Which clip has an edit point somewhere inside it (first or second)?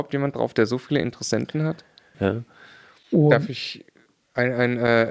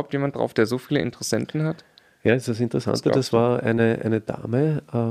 first